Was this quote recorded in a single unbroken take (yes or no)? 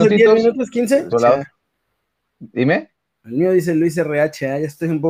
no